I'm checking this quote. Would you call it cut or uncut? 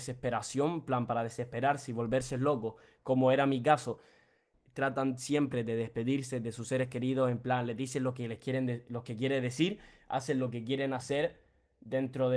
cut